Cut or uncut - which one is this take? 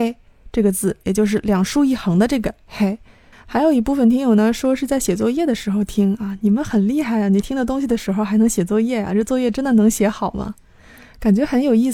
cut